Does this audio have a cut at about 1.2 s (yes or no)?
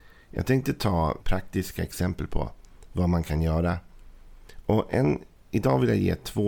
yes